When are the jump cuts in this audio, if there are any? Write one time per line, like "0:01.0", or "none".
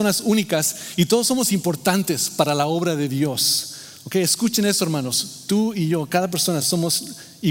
none